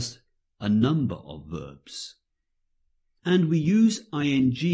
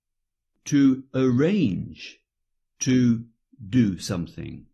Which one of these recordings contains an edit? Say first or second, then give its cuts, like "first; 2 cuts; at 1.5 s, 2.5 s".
first; 1 cut; at 3.2 s